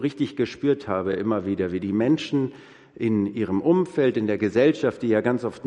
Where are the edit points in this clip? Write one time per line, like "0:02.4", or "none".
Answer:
none